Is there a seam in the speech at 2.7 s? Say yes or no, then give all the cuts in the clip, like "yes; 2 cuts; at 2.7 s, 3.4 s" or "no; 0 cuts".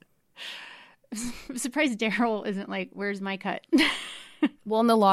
no; 0 cuts